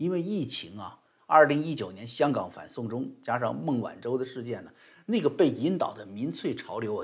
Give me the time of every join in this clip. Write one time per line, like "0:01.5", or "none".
0:01.2